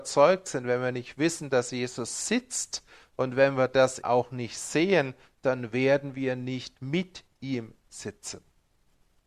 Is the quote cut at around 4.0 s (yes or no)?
yes